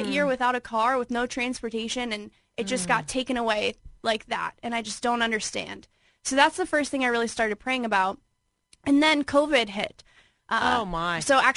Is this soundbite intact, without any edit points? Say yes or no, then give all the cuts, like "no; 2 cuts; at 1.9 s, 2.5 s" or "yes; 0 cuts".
yes; 0 cuts